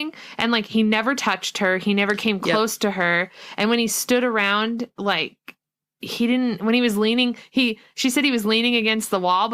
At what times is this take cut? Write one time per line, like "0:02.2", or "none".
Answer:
none